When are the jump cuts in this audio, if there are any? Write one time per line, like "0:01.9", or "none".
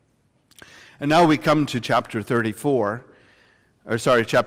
none